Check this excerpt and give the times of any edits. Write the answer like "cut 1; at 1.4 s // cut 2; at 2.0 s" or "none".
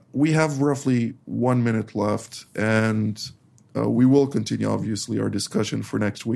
none